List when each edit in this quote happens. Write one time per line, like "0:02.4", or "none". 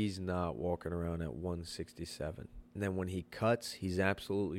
0:02.6